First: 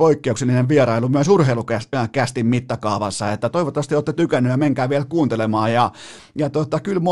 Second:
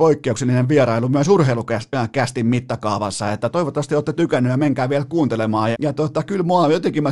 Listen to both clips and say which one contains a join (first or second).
second